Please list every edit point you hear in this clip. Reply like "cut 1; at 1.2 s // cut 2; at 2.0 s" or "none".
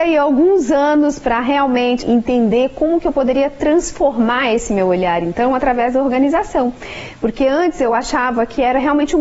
cut 1; at 2.0 s